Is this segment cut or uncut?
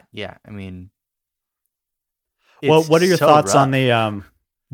uncut